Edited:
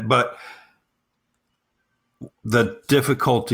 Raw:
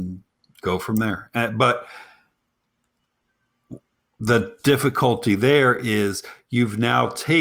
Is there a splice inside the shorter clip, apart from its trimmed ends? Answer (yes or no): yes